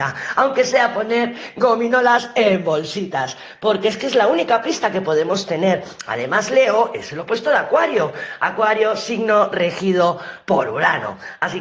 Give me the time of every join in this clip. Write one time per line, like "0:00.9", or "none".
none